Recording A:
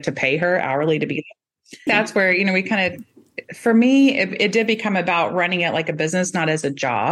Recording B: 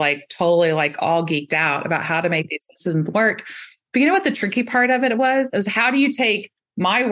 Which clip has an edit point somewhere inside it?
A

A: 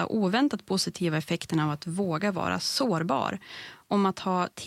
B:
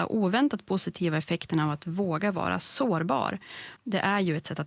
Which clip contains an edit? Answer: B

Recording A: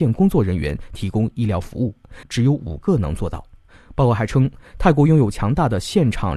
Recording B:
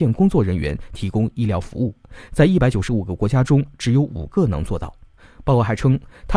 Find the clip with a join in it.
A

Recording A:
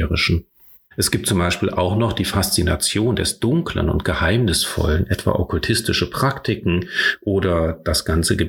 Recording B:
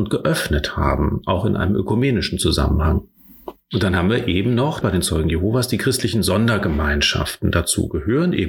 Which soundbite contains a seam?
B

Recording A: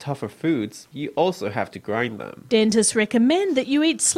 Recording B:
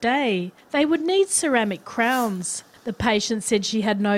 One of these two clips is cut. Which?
A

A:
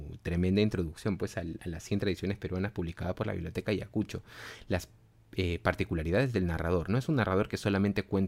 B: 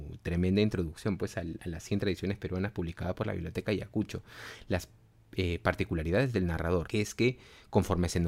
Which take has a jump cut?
B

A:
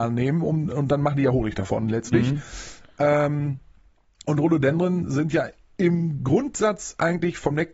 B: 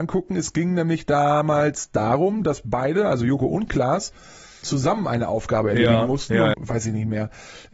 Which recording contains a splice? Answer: B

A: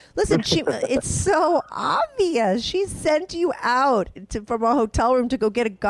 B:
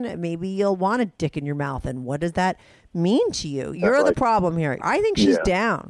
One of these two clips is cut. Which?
B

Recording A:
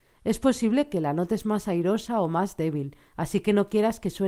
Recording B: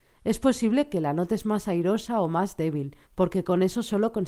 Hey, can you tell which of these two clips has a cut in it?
B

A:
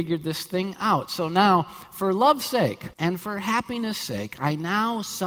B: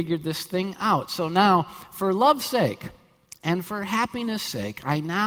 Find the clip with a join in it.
A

